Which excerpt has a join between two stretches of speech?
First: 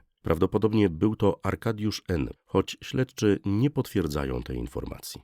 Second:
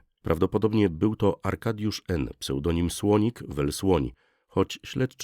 first; 1 cut; at 2.4 s

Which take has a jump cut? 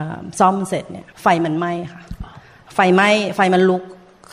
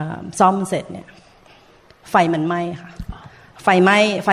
first; 1 cut; at 1.1 s

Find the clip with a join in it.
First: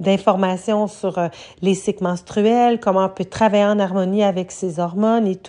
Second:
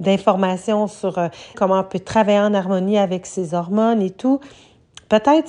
second; 1 cut; at 1.5 s

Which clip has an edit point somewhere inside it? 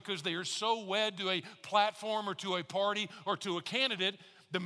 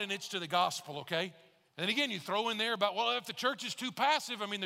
second; 1 cut; at 1.7 s

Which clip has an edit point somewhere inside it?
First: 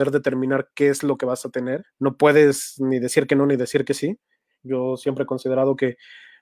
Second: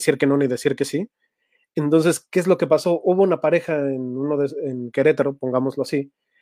first; 2 cuts; at 1.8 s, 4.5 s

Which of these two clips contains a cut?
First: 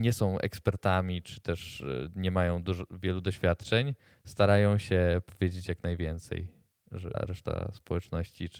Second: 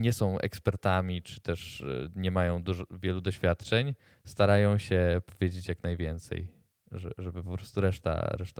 first; 1 cut; at 7.1 s

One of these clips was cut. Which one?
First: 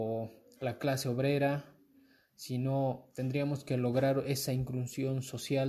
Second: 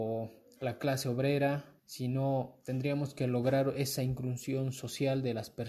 second; 1 cut; at 1.8 s

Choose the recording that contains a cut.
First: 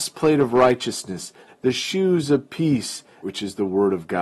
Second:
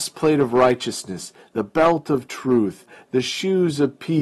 first; 2 cuts; at 1.5 s, 3.2 s

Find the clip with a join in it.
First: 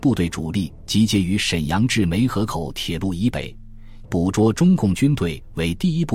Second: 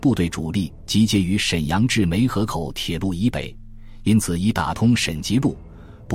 first; 1 cut; at 4.0 s

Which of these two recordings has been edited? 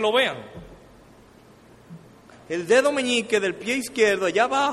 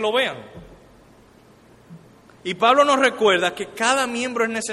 first; 1 cut; at 2.3 s

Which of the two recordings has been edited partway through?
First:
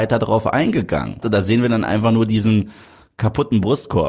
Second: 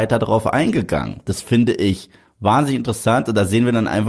first; 1 cut; at 1.2 s

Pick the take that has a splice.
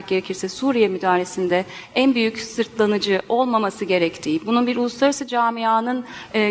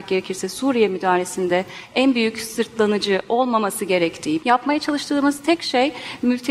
second; 1 cut; at 4.4 s

